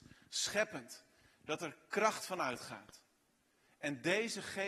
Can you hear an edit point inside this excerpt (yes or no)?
no